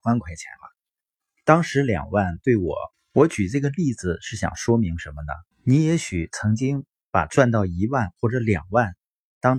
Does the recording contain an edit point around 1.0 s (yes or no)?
no